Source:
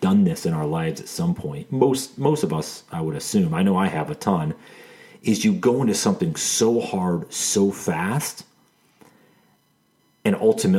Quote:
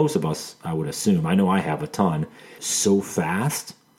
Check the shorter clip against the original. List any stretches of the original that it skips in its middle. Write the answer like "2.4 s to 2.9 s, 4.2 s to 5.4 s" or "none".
4.9 s to 7.3 s